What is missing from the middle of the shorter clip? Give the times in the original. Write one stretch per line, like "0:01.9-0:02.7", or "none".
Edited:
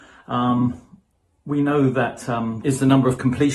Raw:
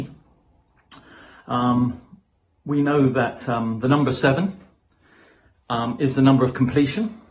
0:03.8-0:06.0